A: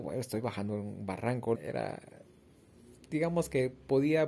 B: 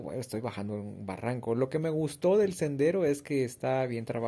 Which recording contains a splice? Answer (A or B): A